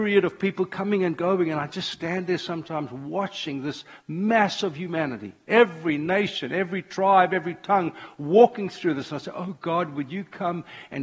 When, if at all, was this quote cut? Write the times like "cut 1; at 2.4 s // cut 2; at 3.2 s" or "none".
none